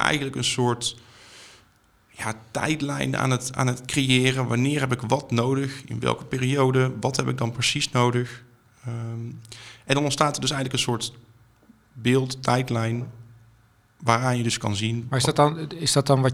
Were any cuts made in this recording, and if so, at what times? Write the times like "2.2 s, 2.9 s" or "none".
none